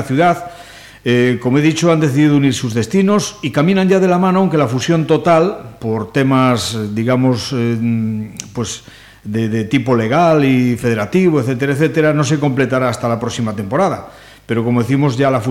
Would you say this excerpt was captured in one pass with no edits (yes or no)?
yes